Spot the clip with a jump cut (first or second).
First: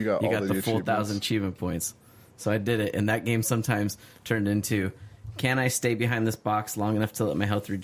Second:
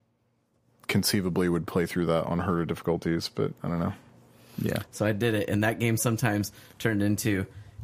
second